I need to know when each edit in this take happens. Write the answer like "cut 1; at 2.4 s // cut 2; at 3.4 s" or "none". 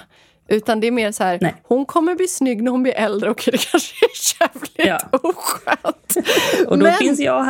none